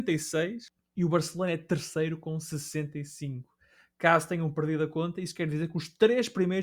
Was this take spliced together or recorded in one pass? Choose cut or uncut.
uncut